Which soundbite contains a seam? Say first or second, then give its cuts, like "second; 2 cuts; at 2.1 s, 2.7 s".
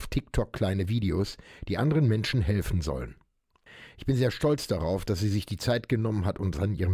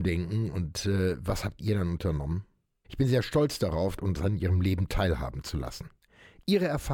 second; 2 cuts; at 2.8 s, 4.0 s